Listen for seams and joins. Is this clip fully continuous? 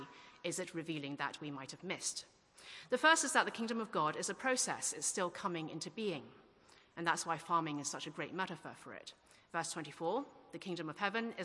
yes; 0 cuts

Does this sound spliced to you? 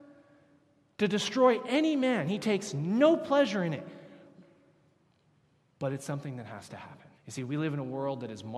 yes; 1 cut; at 7.2 s

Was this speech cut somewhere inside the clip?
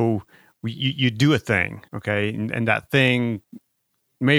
yes; 1 cut; at 1.9 s

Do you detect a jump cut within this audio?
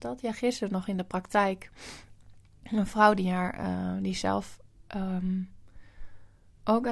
no; 0 cuts

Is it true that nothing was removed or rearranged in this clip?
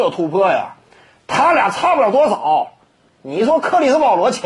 yes; 0 cuts

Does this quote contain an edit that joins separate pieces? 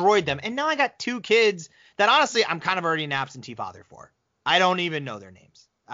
no; 0 cuts

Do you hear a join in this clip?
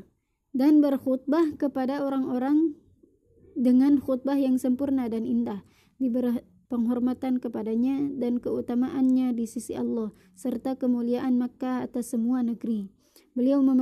yes; 1 cut; at 6.6 s

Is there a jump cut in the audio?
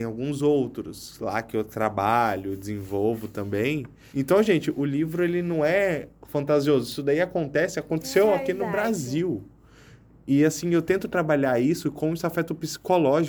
yes; 1 cut; at 4.1 s

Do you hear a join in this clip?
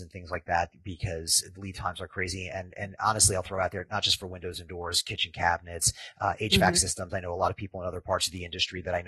no; 0 cuts

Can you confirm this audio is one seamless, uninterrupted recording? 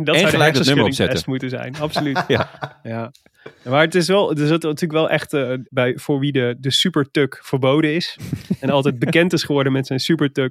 no; 1 cut; at 5.6 s

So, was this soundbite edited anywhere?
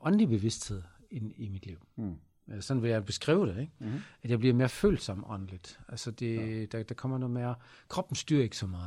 no; 0 cuts

